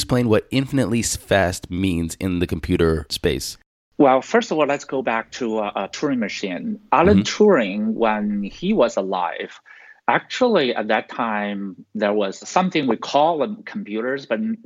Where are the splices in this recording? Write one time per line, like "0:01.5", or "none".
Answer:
none

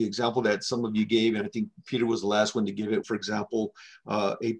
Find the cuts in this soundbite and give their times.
0:03.0

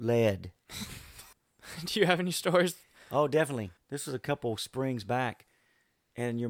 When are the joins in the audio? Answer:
0:01.3

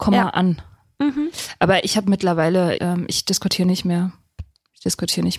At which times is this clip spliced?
0:02.8

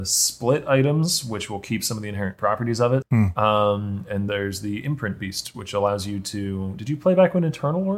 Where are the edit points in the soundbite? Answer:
0:03.0
0:04.3

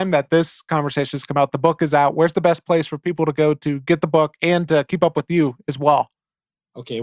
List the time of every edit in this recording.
none

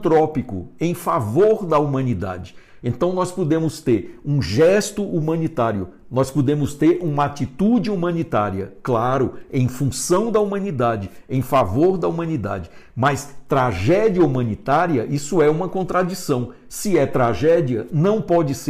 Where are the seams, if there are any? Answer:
none

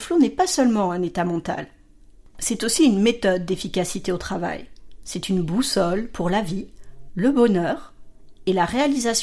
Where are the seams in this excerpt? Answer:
0:07.1

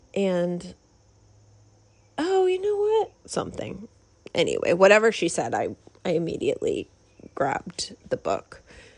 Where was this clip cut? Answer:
0:03.1

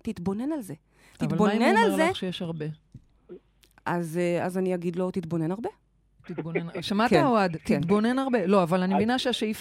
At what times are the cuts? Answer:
none

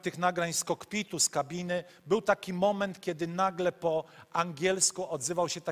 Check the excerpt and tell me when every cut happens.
none

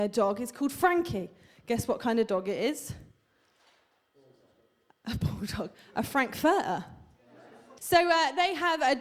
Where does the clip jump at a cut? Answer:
0:07.8

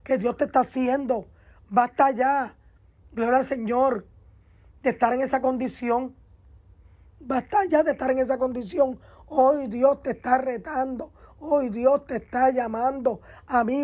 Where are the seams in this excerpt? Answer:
none

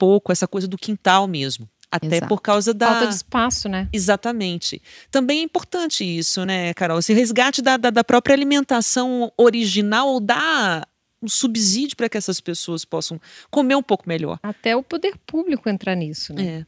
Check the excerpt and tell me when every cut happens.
none

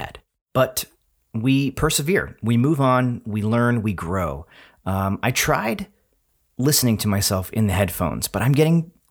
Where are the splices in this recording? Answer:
none

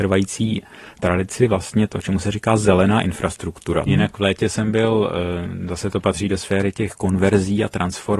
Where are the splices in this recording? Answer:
0:03.9

